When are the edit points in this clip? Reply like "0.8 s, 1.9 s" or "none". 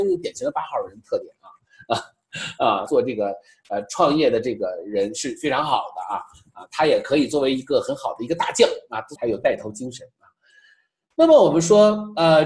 2.9 s, 9.2 s